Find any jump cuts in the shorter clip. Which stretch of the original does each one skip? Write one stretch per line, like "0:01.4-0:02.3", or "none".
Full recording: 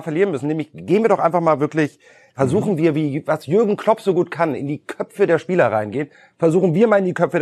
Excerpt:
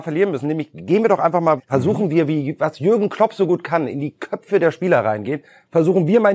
0:01.6-0:02.2

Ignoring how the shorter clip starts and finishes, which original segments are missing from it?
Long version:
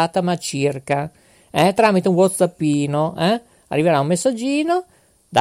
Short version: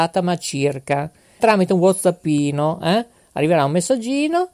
0:01.4-0:01.8

